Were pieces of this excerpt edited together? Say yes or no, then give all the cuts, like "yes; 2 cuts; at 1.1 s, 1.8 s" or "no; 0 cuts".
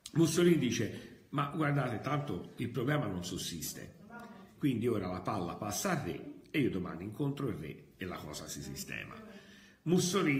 yes; 1 cut; at 4.6 s